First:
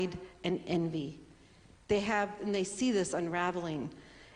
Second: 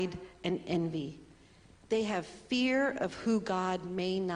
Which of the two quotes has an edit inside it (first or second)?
first